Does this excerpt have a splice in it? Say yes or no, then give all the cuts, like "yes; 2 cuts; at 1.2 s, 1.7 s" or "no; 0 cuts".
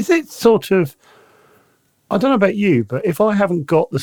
no; 0 cuts